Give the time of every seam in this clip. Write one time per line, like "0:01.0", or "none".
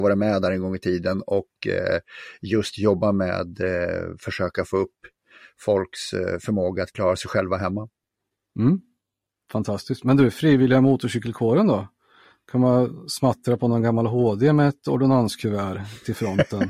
none